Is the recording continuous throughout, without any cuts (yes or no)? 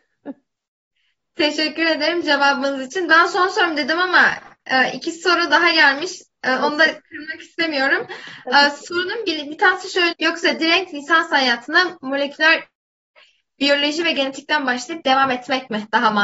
no